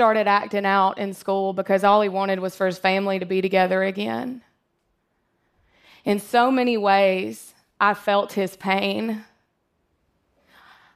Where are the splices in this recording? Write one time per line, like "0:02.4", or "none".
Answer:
none